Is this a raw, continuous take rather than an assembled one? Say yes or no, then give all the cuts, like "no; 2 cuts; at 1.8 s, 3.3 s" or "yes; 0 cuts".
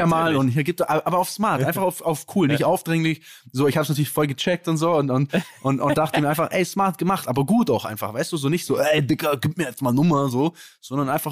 yes; 0 cuts